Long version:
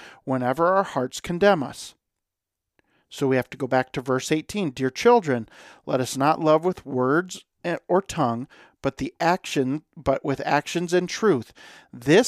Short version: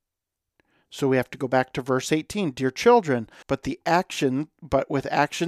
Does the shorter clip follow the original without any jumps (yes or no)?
no